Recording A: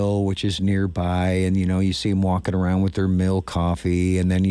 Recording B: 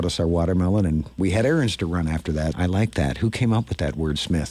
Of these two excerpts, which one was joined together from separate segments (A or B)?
B